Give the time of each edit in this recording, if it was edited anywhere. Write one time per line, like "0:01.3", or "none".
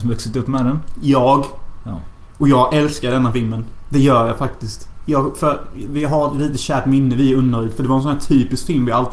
none